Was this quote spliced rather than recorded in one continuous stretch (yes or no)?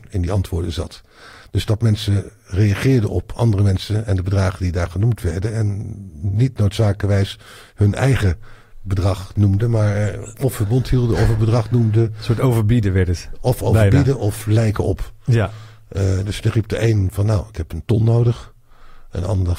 no